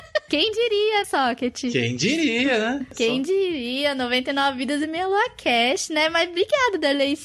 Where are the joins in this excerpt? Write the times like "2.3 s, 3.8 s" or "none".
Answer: 1.0 s